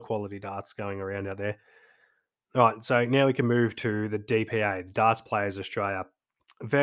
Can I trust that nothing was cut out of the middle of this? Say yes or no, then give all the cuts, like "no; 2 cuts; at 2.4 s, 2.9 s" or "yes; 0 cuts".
yes; 0 cuts